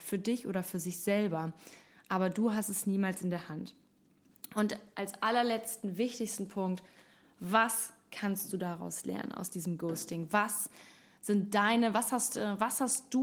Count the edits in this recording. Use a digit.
0